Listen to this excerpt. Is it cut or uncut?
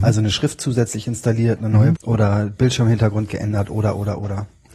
cut